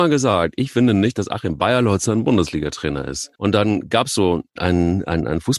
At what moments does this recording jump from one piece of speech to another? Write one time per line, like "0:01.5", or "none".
0:03.3
0:04.6